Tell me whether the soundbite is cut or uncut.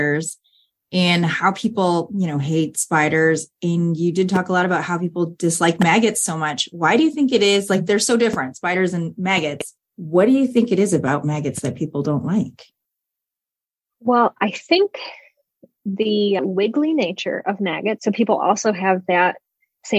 cut